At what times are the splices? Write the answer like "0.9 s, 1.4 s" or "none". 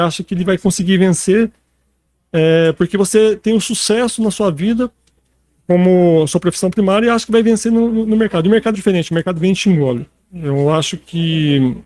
8.7 s, 10.3 s